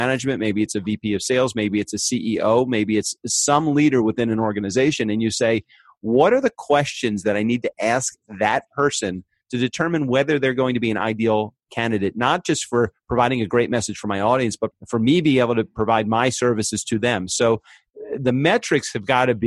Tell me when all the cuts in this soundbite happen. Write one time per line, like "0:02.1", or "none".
none